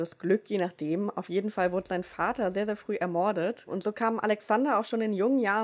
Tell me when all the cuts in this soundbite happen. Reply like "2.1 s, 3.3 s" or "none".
none